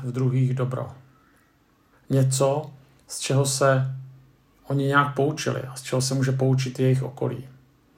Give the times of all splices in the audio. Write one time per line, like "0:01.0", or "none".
0:01.9

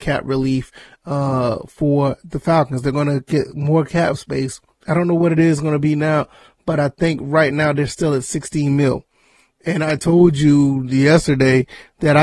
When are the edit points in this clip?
none

